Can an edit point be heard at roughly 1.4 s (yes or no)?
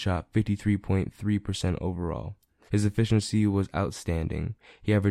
no